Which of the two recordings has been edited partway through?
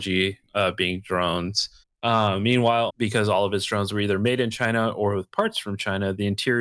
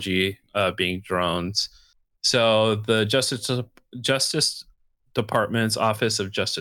first; 2 cuts; at 1.8 s, 2.9 s

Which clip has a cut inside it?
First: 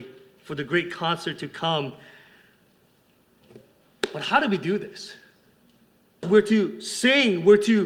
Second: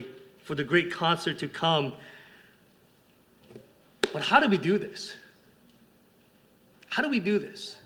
first; 1 cut; at 6.2 s

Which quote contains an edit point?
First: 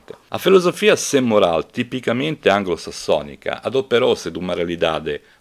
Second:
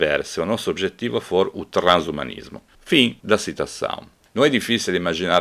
second; 1 cut; at 2.7 s

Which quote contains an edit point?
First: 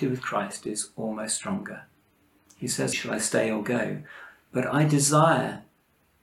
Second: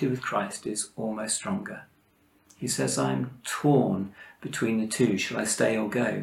first; 1 cut; at 2.9 s

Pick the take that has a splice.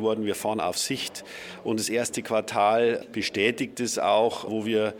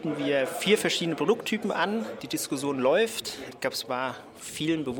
second; 1 cut; at 2.2 s

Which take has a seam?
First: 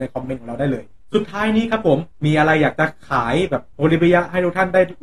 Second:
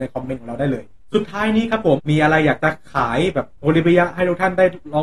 second; 1 cut; at 2.0 s

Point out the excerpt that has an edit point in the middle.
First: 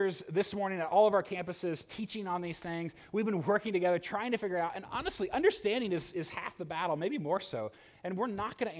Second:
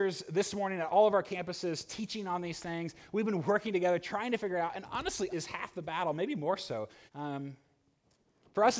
second; 2 cuts; at 5.3 s, 7.1 s

